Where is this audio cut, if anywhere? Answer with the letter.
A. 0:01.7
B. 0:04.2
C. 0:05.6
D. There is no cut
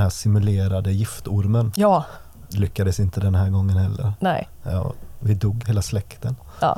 C